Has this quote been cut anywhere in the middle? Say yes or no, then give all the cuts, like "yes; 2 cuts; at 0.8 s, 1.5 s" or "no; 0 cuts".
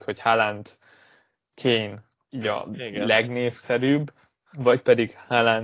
yes; 1 cut; at 2.3 s